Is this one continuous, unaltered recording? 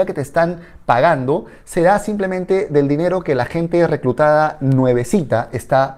yes; 0 cuts

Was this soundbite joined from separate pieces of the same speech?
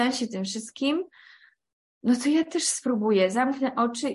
no; 0 cuts

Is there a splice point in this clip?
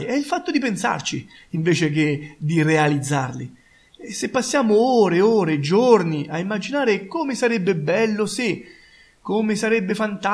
no; 0 cuts

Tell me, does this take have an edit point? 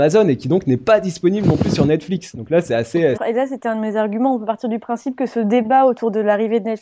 yes; 1 cut; at 3.1 s

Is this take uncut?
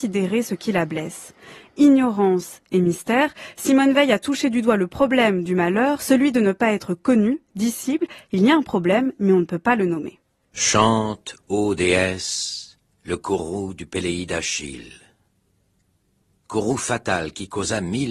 yes; 0 cuts

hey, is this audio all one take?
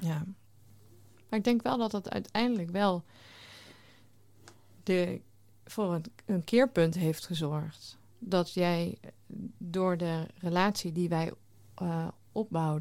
yes; 0 cuts

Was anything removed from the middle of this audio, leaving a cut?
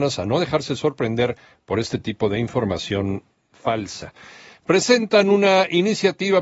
no; 0 cuts

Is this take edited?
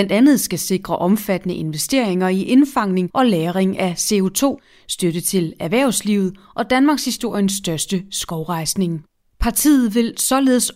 yes; 1 cut; at 9.3 s

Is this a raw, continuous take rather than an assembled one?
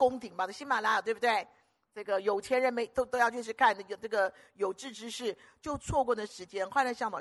no; 1 cut; at 3.4 s

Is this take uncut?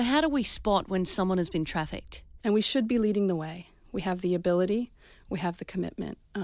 no; 1 cut; at 2.4 s

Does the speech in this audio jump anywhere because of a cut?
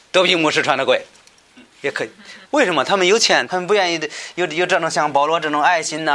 yes; 2 cuts; at 2.4 s, 3.5 s

